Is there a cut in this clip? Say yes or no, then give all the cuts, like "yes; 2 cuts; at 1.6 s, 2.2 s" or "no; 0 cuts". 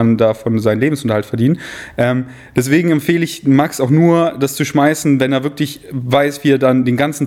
no; 0 cuts